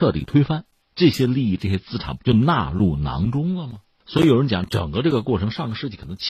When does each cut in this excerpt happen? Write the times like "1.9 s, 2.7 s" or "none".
2.2 s